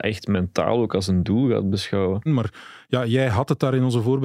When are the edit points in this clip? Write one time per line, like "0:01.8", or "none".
0:02.3